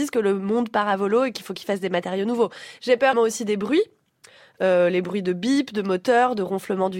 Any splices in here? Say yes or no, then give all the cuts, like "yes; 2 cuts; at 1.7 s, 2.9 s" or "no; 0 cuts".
yes; 1 cut; at 3.1 s